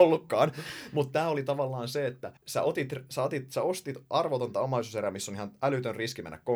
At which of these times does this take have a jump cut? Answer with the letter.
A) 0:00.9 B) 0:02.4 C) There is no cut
B